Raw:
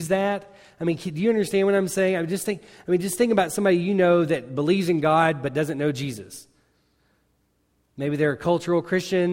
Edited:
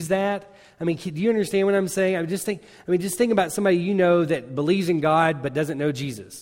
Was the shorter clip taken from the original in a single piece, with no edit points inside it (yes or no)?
yes